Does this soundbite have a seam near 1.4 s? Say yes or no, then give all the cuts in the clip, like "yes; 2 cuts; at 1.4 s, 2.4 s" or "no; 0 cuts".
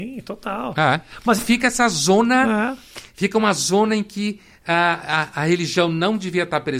yes; 1 cut; at 1.4 s